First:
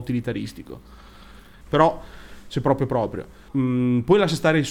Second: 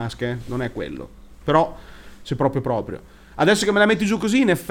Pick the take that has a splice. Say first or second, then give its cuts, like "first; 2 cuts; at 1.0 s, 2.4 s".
first; 2 cuts; at 1.6 s, 3.5 s